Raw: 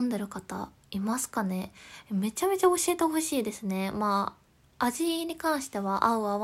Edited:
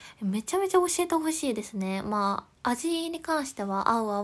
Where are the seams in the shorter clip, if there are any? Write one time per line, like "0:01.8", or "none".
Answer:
0:02.5